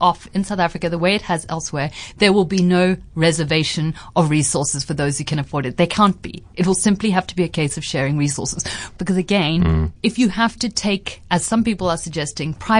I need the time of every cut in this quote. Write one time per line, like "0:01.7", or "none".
0:09.0
0:10.0